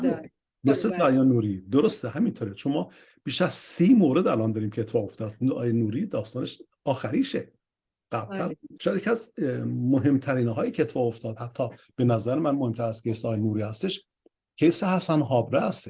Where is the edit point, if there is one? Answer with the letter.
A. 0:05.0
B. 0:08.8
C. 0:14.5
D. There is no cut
B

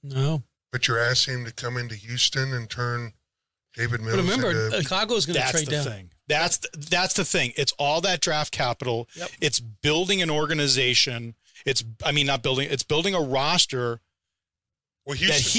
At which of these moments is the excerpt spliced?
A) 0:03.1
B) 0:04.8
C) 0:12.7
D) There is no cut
B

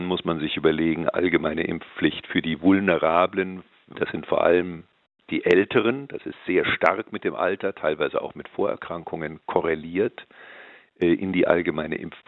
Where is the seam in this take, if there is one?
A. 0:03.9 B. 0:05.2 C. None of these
A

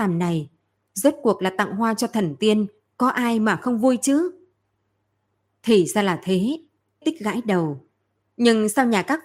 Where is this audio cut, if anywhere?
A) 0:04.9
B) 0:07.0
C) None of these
B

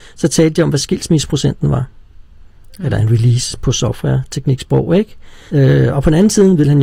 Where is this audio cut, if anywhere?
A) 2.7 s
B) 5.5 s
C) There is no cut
B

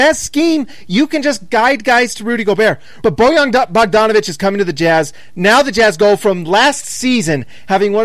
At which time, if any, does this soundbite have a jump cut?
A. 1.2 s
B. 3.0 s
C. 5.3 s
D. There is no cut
B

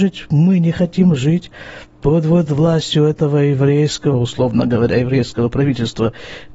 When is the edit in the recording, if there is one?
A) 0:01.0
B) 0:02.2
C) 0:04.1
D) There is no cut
C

